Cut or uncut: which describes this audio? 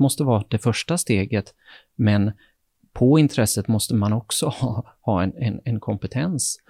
uncut